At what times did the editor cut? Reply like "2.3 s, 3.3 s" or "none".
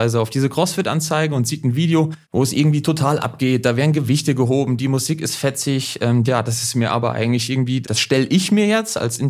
2.2 s, 6.2 s, 7.8 s

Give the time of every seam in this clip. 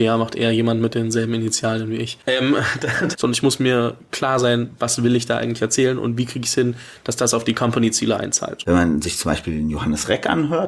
3.1 s, 8.6 s

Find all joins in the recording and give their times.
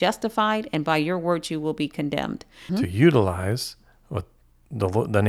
2.7 s

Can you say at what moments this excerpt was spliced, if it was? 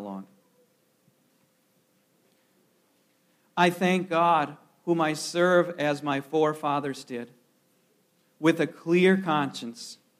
none

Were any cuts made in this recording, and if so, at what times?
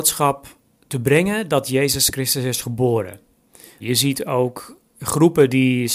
3.8 s

